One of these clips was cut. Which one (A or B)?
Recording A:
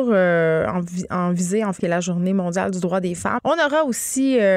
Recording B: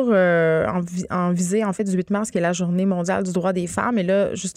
A